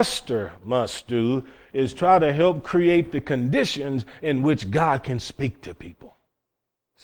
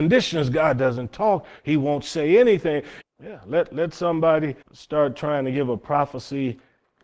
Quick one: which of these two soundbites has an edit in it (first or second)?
second